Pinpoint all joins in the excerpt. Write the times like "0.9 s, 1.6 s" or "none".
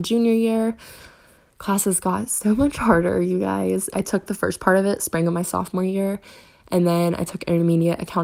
3.9 s